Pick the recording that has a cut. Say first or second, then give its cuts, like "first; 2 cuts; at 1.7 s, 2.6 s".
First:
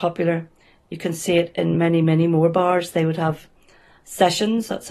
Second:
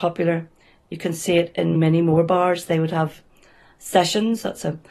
second; 1 cut; at 1.7 s